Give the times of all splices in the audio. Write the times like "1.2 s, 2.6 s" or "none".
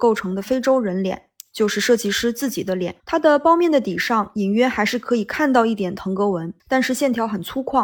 3.0 s, 6.6 s